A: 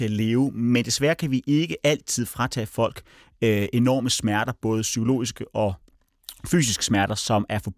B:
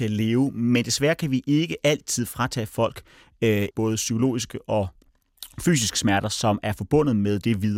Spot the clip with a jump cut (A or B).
B